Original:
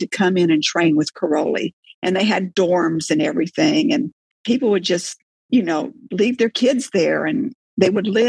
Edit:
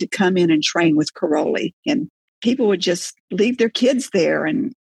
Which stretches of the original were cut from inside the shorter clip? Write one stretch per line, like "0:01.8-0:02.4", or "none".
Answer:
0:01.9-0:03.9
0:05.3-0:06.1